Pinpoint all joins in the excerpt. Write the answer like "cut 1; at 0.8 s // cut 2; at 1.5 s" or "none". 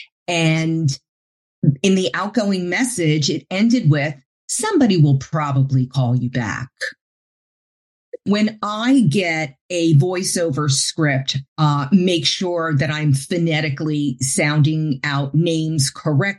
cut 1; at 8.2 s // cut 2; at 11.5 s